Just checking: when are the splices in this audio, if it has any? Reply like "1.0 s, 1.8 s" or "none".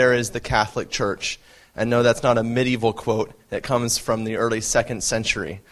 none